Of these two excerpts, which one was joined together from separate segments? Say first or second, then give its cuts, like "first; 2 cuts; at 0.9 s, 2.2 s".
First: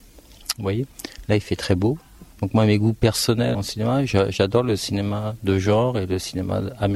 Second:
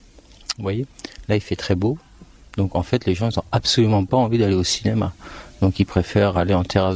first; 2 cuts; at 2.3 s, 3.5 s